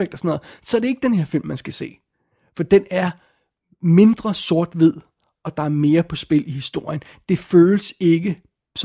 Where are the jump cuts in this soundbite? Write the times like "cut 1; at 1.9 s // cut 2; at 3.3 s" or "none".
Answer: none